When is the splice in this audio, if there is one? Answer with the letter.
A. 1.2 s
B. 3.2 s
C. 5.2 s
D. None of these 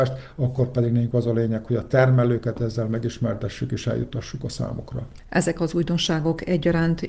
D